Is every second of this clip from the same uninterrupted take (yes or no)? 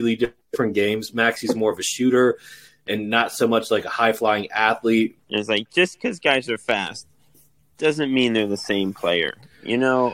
no